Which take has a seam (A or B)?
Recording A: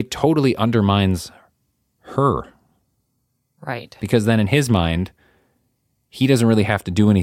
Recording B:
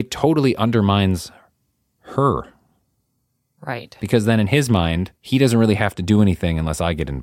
B